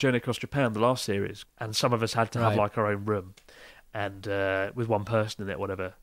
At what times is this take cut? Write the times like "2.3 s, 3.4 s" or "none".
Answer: 1.4 s